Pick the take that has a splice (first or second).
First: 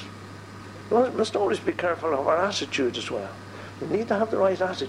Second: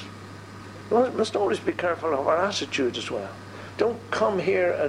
second